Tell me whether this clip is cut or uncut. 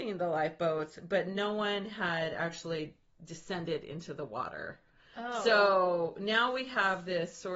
uncut